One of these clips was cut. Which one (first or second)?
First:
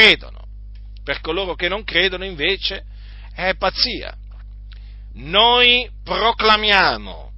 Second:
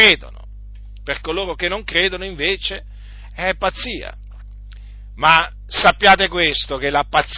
first